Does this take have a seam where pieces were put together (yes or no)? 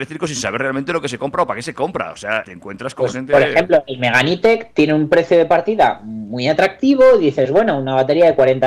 yes